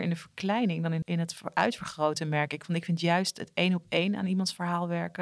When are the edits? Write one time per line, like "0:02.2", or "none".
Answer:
0:01.0